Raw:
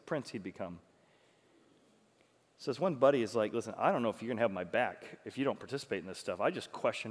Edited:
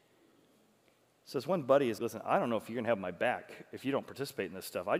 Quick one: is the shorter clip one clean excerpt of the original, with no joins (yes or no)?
no